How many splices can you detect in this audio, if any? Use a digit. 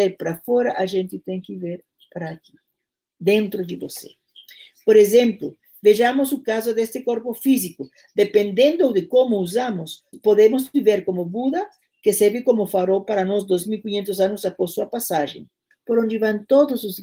2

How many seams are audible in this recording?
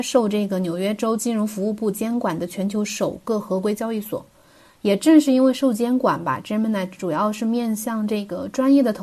0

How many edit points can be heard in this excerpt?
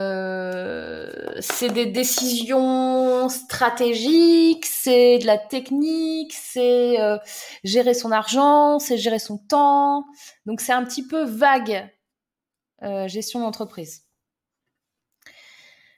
0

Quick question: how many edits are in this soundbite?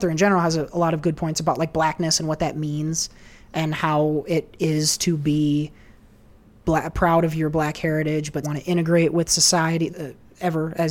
2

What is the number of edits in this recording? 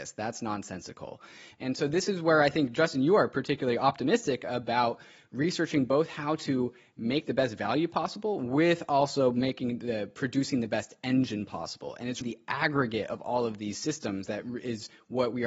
2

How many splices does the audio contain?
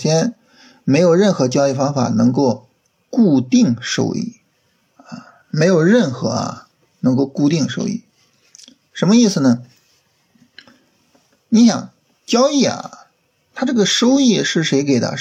0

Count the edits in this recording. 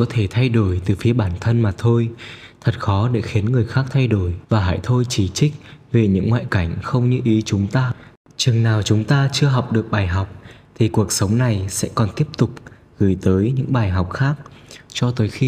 1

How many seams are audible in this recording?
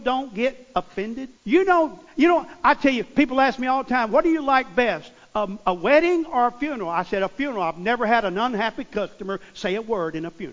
1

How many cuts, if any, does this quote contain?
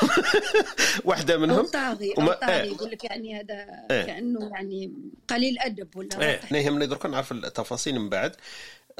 2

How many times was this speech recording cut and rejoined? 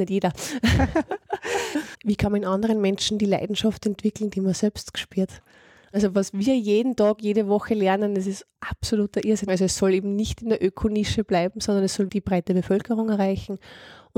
3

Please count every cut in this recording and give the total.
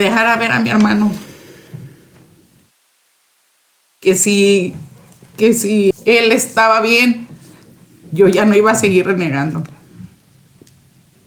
1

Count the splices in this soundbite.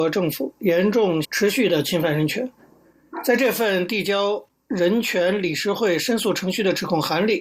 1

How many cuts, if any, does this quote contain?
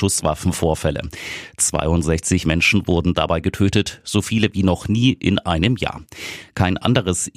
0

